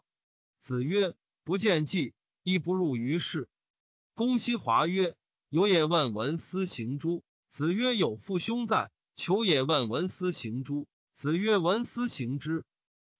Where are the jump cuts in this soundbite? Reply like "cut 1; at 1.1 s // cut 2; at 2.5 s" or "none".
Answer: cut 1; at 3.7 s